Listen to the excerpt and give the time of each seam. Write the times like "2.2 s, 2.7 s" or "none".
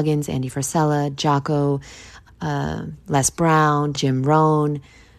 2.3 s, 3.9 s